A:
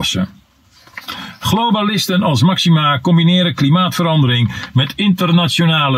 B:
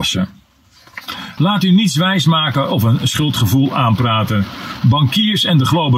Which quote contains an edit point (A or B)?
B